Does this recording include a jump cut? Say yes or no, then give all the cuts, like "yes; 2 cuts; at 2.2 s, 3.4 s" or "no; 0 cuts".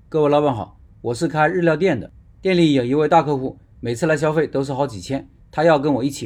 no; 0 cuts